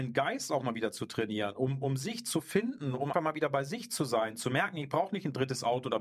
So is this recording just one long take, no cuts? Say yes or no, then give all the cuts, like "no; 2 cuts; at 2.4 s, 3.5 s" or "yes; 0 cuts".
no; 1 cut; at 3.1 s